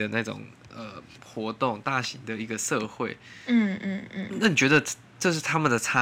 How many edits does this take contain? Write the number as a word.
zero